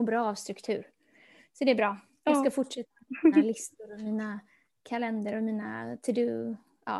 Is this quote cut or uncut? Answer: uncut